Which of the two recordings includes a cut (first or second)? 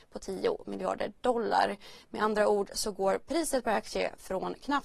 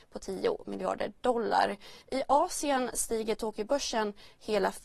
second